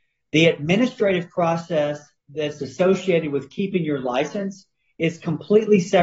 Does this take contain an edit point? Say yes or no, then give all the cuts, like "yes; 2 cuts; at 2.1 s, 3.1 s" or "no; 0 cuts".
no; 0 cuts